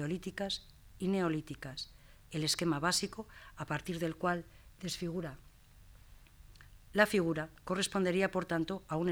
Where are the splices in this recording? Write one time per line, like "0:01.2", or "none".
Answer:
none